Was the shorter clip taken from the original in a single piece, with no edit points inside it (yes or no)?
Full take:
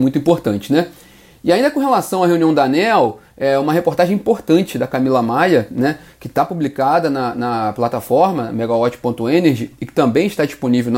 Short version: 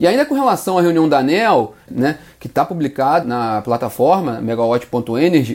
no